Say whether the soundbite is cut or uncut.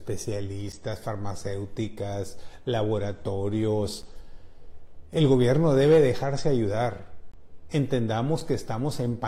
uncut